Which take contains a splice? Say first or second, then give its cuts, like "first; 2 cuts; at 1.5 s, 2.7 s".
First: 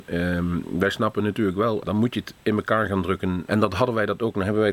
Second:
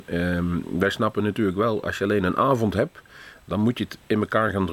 first; 2 cuts; at 1.8 s, 3.5 s